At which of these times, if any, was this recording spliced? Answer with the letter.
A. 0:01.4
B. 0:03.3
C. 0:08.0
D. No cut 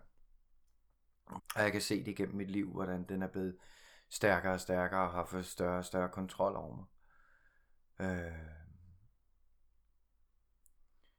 A